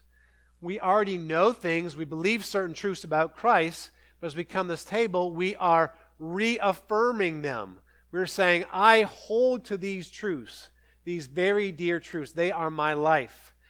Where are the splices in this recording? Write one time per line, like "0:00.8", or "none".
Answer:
none